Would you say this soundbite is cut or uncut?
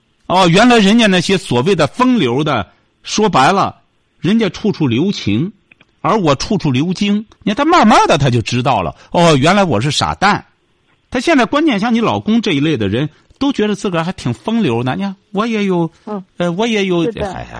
cut